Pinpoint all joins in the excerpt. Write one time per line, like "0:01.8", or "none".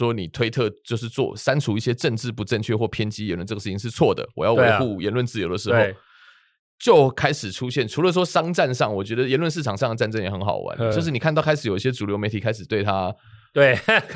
none